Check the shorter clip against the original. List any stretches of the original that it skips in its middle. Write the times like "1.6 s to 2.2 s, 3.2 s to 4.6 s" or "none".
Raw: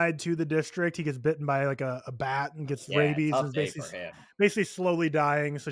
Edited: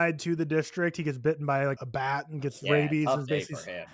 1.8 s to 2.0 s